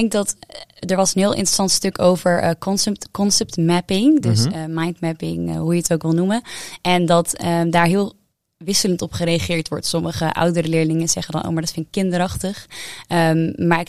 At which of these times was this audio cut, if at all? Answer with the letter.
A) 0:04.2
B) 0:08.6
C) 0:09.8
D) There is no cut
D